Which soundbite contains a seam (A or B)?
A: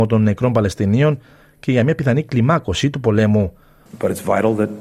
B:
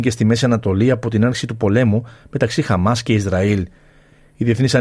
A